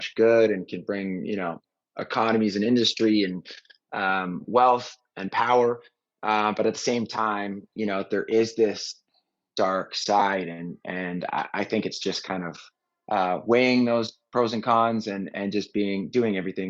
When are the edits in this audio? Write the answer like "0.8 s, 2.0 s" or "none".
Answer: none